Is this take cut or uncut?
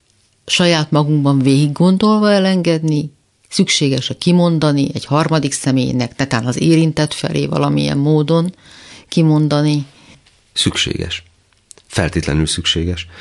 uncut